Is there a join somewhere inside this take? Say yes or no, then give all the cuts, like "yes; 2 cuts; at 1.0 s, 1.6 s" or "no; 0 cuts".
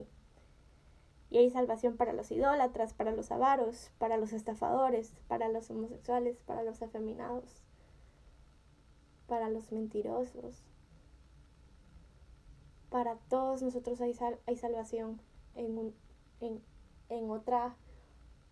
yes; 1 cut; at 15.5 s